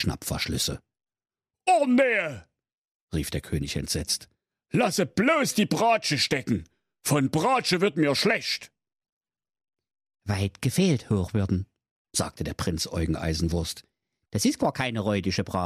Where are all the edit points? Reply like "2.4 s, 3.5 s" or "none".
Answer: none